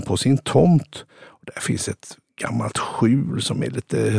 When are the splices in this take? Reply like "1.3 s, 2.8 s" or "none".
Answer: none